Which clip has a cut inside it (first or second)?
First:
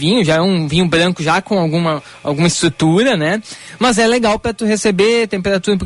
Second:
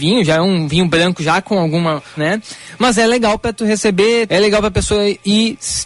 second